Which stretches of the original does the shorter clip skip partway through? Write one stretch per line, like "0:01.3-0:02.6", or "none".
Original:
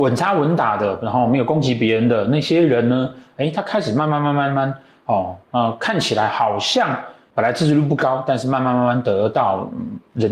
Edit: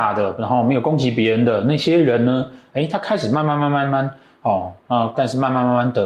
0:05.8-0:08.2

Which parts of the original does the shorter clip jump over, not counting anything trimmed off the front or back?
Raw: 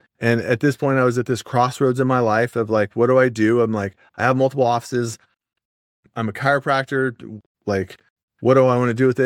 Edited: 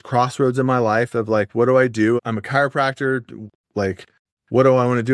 0:03.6-0:06.1

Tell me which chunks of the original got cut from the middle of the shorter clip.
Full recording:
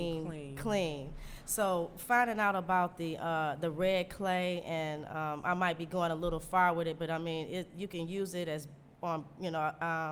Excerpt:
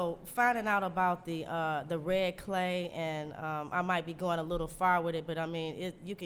none

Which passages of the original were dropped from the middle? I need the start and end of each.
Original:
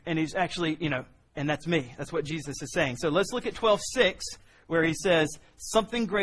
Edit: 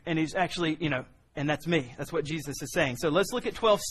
none

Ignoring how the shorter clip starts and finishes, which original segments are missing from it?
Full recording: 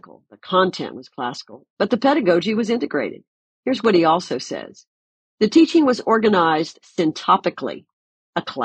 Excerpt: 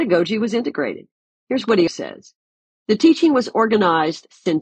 0:04.0-0:04.4

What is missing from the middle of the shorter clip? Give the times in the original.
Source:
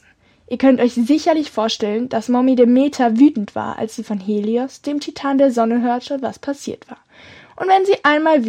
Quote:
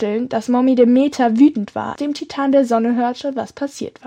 0:03.8-0:04.8

